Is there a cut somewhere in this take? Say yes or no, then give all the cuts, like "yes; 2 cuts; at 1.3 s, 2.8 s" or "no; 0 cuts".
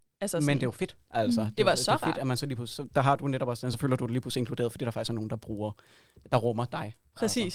no; 0 cuts